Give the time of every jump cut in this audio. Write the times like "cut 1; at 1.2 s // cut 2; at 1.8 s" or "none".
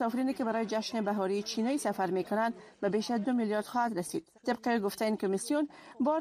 cut 1; at 4.4 s